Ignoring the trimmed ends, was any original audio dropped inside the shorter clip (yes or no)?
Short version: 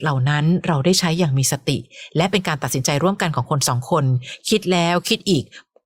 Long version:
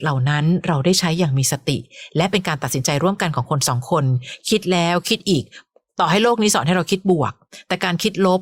no